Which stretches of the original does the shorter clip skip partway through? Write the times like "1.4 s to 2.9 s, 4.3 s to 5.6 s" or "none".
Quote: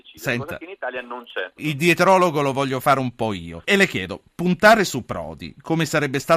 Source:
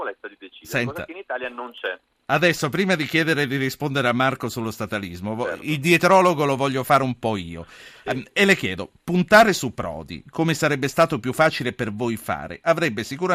2.0 s to 5.6 s, 7.7 s to 8.3 s